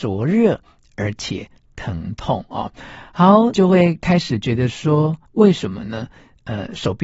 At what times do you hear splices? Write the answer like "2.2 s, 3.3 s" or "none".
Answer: 3.5 s, 5.2 s